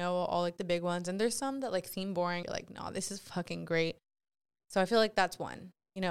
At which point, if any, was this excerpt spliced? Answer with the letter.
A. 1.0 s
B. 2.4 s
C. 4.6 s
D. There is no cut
B